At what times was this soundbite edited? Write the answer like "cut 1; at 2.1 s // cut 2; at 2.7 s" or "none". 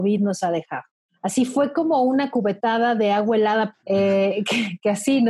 cut 1; at 1.1 s // cut 2; at 3.7 s